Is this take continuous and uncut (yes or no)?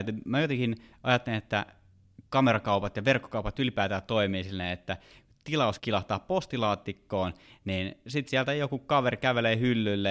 yes